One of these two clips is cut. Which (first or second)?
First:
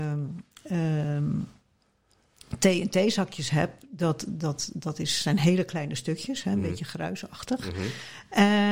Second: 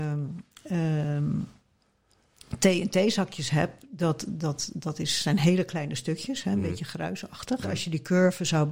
second